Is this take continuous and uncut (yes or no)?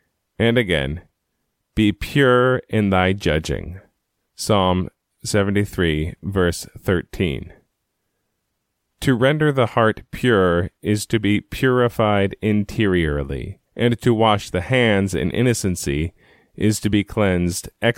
no